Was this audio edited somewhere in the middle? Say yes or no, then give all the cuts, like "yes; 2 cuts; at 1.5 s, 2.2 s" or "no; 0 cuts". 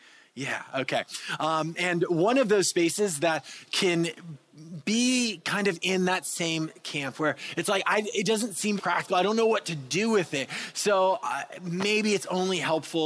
yes; 1 cut; at 8.8 s